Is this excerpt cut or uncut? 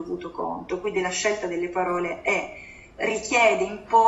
cut